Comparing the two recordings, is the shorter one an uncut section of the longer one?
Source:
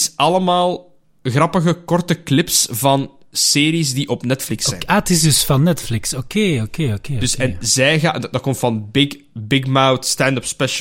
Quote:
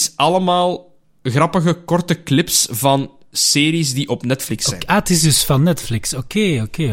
yes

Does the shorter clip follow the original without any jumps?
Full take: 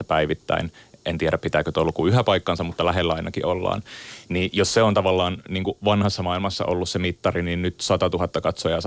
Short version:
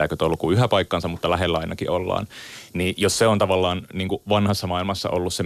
yes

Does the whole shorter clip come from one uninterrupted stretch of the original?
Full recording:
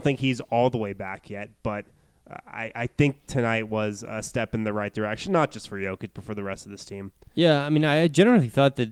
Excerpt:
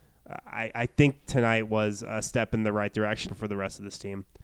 no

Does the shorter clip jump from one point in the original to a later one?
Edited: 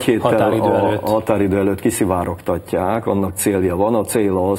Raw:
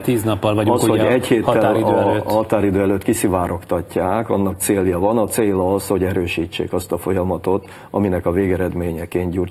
no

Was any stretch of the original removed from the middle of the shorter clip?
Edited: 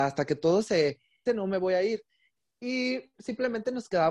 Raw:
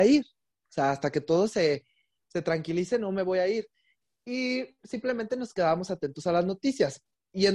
yes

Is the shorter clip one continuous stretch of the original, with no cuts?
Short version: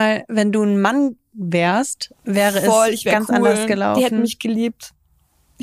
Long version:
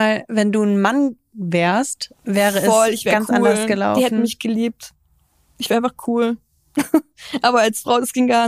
yes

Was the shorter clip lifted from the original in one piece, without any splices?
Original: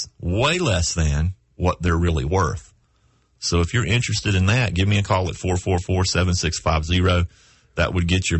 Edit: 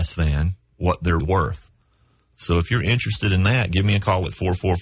no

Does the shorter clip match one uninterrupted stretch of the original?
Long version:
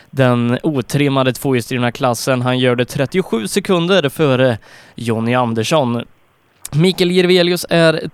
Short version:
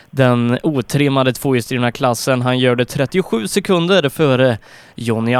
yes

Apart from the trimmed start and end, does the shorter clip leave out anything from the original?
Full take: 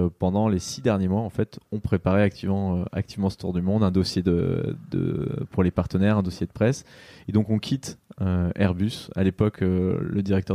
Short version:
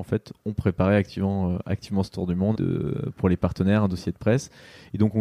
yes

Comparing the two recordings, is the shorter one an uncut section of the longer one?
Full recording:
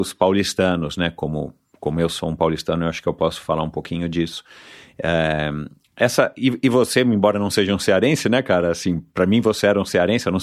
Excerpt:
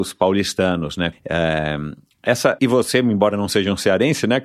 no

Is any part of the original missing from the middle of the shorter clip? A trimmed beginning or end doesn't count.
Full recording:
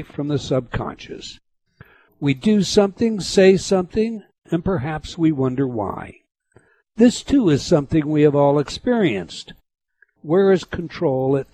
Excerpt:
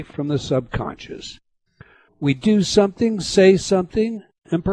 no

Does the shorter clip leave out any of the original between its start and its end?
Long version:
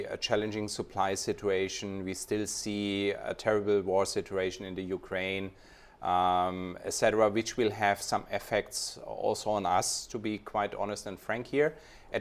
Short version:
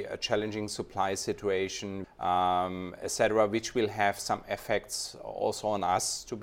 yes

